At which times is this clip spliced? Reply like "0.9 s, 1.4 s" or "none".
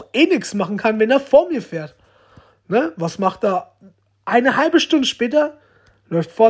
none